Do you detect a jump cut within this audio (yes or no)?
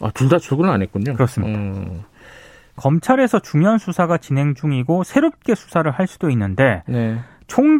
yes